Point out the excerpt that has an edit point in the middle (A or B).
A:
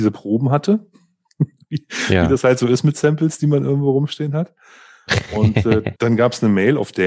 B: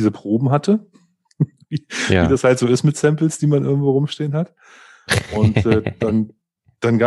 A